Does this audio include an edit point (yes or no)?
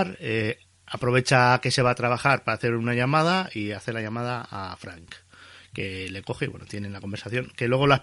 no